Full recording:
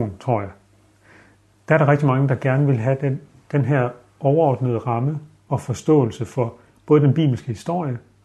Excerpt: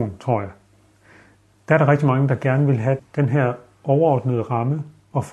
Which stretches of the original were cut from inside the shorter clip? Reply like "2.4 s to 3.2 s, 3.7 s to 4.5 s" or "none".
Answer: 3.0 s to 3.4 s